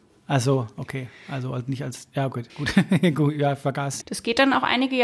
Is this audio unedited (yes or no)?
no